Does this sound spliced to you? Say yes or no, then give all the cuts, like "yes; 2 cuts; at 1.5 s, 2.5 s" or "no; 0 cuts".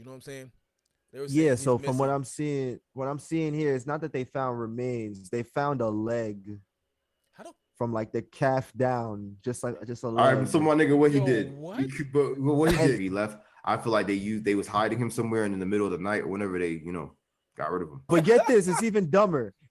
yes; 2 cuts; at 13.0 s, 18.1 s